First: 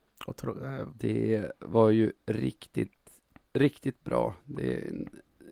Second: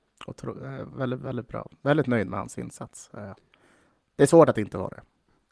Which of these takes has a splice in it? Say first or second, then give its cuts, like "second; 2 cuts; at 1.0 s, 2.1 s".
first; 1 cut; at 0.9 s